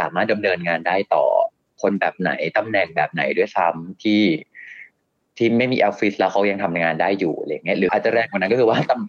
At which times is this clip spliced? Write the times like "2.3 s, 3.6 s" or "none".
7.9 s